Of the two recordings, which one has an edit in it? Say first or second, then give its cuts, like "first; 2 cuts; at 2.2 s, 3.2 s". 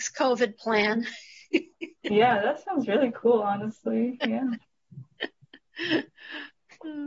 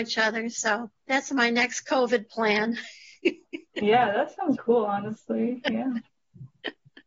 second; 2 cuts; at 1.0 s, 4.6 s